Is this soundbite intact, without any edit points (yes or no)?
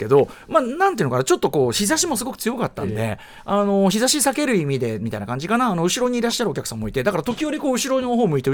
yes